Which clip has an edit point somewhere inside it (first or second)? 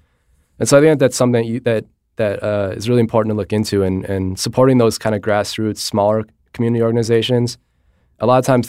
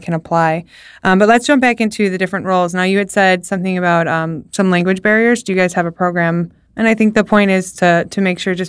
second